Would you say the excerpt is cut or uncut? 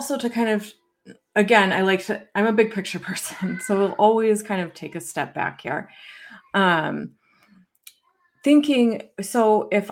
uncut